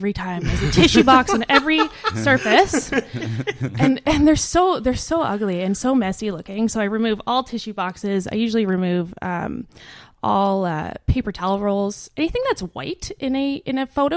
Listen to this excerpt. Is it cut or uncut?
uncut